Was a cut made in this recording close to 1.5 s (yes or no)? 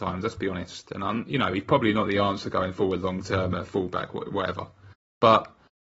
no